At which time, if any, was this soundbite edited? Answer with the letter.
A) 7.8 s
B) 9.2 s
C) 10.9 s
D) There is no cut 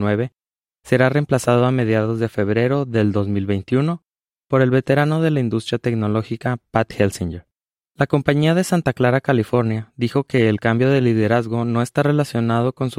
A